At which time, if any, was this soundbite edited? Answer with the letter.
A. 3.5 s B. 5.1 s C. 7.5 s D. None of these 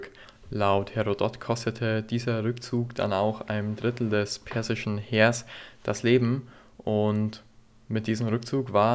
D